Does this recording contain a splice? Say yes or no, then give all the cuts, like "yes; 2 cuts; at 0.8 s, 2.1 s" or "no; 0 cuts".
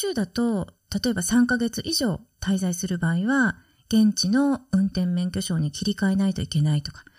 no; 0 cuts